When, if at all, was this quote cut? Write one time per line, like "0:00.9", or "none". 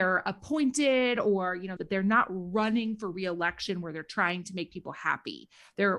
0:01.8